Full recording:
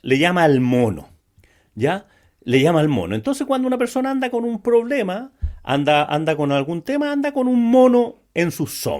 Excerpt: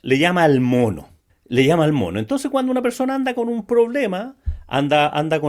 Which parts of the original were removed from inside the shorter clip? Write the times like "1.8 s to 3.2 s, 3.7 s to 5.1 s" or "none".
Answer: 1.3 s to 2.3 s